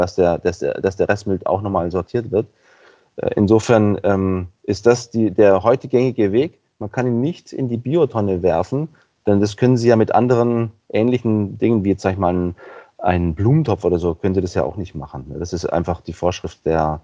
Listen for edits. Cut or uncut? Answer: uncut